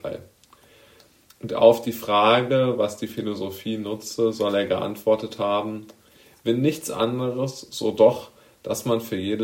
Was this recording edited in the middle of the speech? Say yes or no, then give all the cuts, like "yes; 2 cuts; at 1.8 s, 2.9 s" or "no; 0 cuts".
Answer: no; 0 cuts